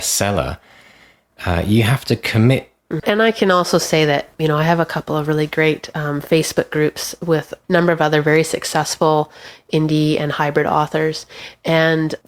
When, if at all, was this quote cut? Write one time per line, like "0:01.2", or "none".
0:03.0